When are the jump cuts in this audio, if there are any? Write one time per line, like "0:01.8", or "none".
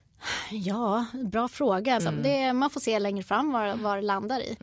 0:02.0